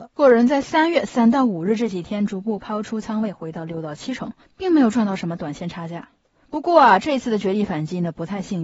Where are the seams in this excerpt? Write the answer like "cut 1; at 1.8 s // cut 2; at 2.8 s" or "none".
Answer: cut 1; at 6.4 s